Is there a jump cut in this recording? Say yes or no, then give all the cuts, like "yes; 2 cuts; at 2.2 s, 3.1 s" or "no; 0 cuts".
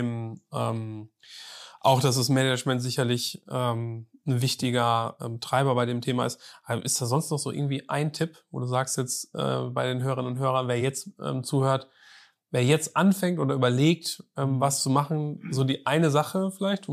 no; 0 cuts